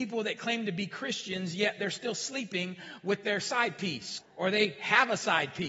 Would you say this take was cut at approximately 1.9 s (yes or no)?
no